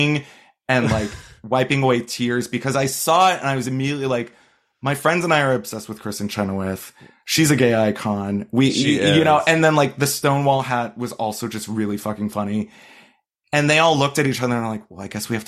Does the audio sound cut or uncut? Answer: uncut